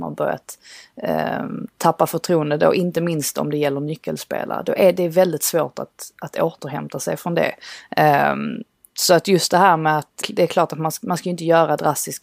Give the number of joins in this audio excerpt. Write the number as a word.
one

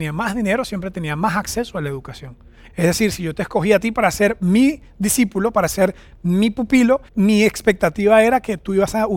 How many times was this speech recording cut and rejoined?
two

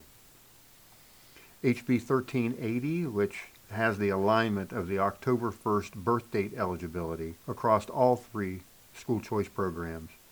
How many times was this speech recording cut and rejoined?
two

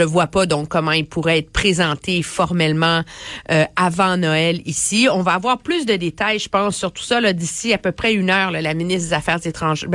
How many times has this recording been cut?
zero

